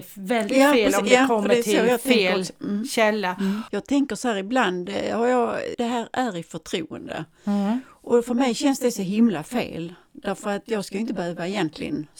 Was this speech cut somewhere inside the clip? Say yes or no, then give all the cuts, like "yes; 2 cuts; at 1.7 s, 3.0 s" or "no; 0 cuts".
yes; 2 cuts; at 3.7 s, 5.7 s